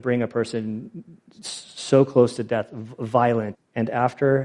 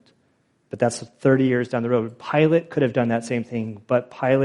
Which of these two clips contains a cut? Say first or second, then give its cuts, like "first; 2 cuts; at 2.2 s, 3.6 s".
first; 1 cut; at 3.5 s